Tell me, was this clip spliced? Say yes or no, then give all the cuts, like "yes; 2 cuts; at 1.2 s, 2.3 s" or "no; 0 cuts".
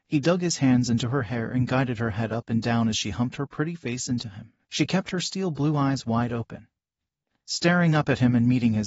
no; 0 cuts